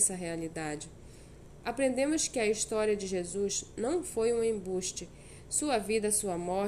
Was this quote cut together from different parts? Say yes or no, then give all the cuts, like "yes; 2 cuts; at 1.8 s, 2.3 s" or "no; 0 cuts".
no; 0 cuts